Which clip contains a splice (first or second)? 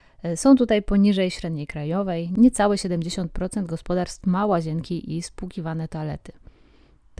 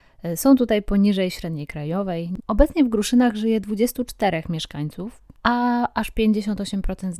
second